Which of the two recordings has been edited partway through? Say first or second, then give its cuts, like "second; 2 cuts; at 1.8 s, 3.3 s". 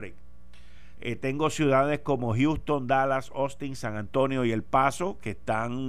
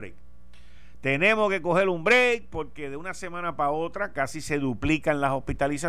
first; 1 cut; at 0.9 s